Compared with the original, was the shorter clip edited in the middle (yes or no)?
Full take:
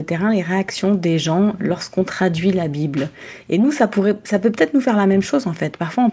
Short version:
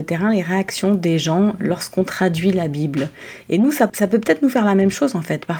yes